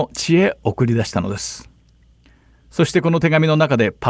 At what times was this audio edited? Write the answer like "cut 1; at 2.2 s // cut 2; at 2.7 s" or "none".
none